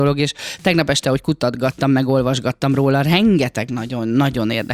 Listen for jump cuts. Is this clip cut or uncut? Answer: uncut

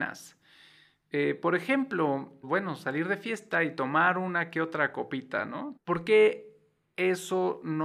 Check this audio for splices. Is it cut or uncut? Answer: cut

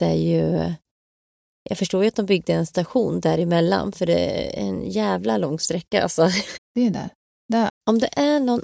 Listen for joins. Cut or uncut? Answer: cut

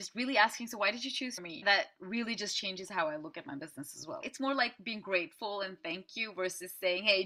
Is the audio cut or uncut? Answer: cut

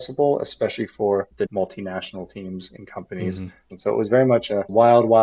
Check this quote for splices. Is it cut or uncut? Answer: cut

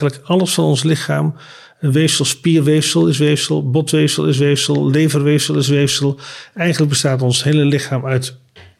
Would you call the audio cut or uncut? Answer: uncut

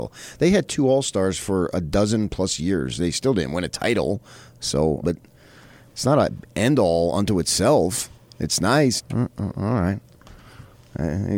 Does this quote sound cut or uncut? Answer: cut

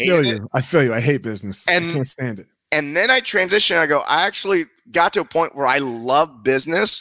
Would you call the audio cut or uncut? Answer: uncut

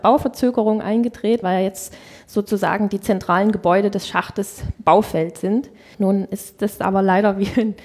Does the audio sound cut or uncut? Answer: cut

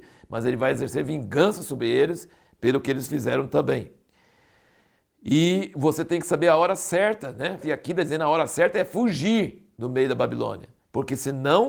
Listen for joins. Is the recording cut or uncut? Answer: cut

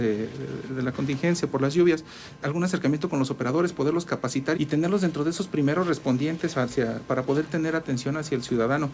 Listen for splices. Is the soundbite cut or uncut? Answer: cut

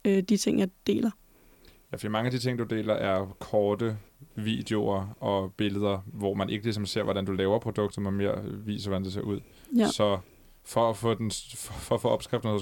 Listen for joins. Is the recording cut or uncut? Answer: uncut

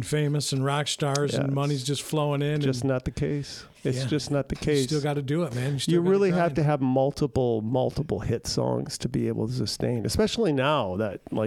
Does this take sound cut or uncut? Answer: uncut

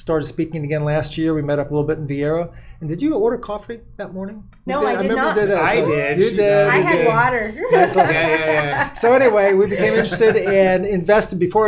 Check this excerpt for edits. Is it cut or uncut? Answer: uncut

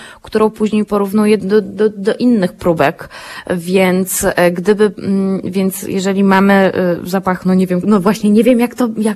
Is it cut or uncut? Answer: cut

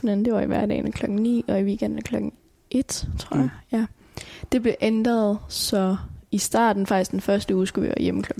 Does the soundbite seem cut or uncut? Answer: uncut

